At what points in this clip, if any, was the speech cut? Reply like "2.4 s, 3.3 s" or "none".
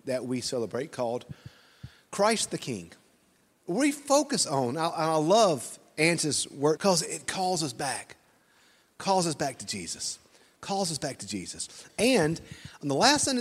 6.8 s, 11.9 s

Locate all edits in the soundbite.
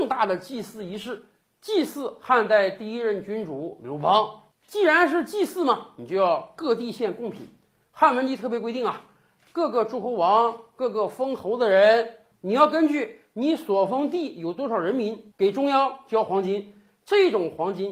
none

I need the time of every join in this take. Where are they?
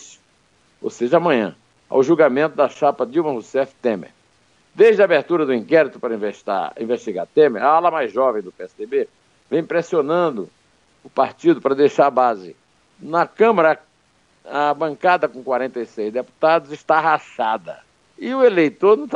none

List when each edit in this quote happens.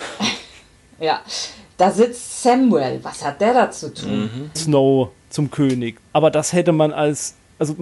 4.6 s, 6.0 s

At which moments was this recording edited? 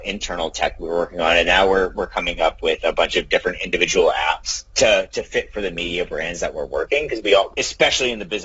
4.7 s, 7.5 s

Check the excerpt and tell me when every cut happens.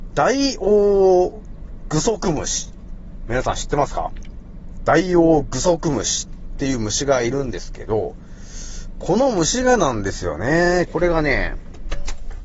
10.9 s

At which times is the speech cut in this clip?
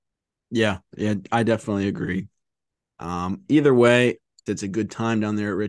4.5 s

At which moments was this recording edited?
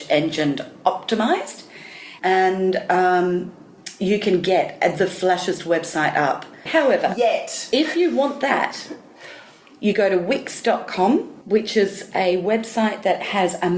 2.2 s, 6.7 s, 11.4 s

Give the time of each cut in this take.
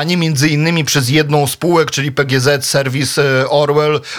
none

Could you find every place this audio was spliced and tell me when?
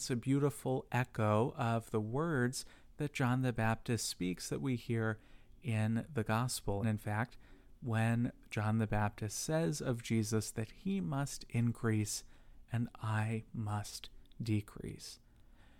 6.8 s

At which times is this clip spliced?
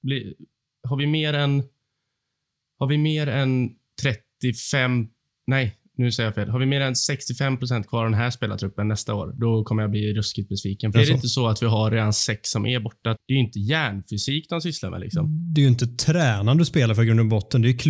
10.9 s, 13.2 s

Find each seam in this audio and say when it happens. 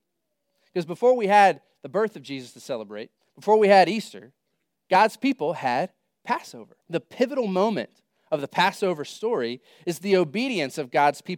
4.9 s, 6.8 s

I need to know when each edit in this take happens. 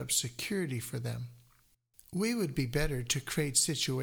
none

